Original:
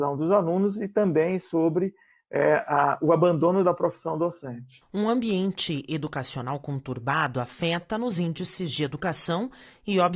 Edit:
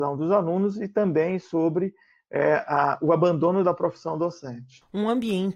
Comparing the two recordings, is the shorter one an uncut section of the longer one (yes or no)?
yes